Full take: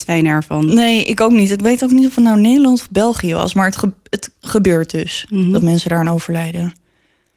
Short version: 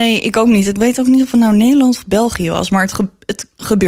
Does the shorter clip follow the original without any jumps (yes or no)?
yes